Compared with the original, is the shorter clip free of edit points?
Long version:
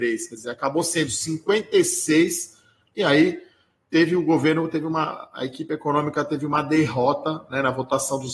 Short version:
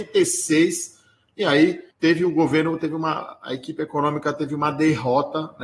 no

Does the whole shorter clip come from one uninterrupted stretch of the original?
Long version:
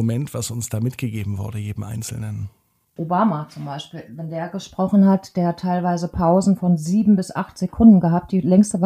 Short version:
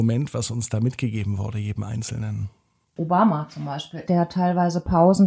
no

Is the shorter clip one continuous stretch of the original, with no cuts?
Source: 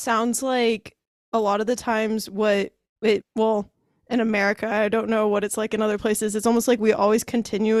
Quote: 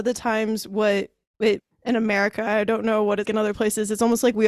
no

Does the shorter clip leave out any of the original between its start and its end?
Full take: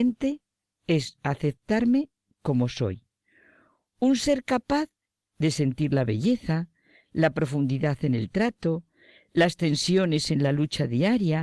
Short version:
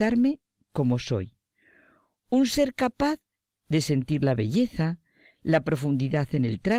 no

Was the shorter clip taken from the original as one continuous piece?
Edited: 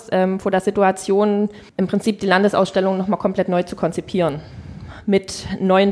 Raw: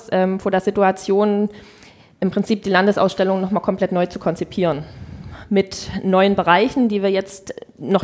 no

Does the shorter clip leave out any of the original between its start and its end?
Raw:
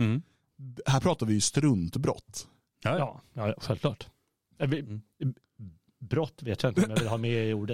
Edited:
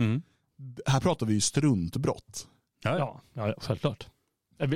no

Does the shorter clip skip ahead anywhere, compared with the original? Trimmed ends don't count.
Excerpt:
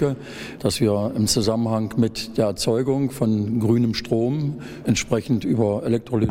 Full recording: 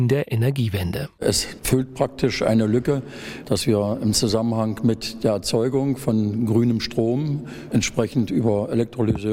no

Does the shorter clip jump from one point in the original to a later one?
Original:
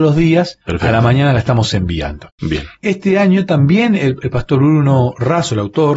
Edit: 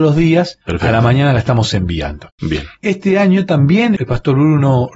yes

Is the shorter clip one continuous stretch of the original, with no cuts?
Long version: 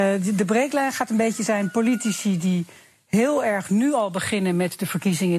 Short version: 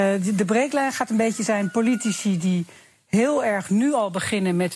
yes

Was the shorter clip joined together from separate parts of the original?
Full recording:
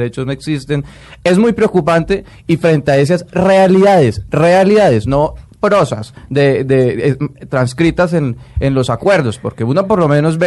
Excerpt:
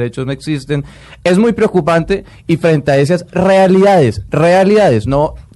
no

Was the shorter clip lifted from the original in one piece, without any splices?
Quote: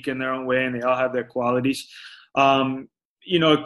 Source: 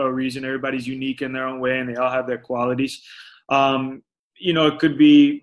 yes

